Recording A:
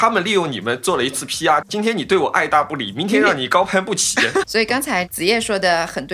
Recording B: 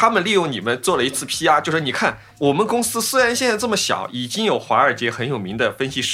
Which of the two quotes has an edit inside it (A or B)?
A